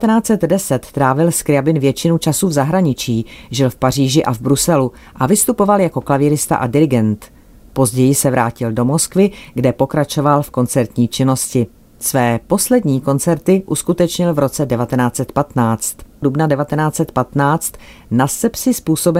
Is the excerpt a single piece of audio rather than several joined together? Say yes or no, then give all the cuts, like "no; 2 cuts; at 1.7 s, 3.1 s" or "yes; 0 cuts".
no; 1 cut; at 16.2 s